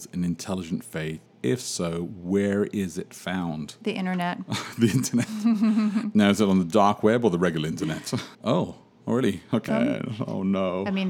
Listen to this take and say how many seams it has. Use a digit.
2